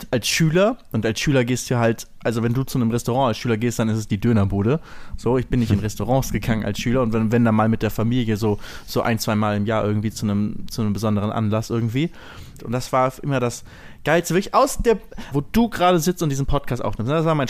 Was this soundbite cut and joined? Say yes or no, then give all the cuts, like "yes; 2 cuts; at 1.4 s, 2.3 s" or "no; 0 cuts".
yes; 2 cuts; at 12.6 s, 15.3 s